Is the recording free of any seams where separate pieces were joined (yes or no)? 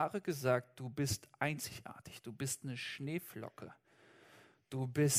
yes